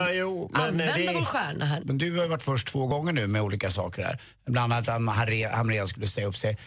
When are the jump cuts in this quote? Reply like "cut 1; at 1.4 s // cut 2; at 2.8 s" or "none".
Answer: cut 1; at 1.8 s